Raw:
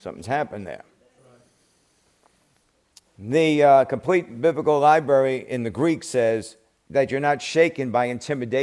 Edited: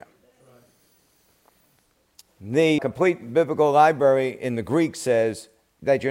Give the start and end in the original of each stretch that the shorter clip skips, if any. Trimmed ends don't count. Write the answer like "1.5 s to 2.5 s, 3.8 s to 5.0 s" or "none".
3.6 s to 3.9 s